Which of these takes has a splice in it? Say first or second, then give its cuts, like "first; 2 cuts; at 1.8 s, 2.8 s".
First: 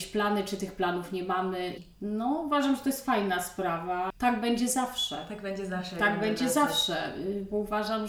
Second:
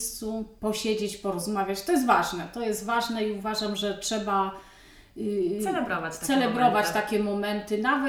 first; 1 cut; at 1.8 s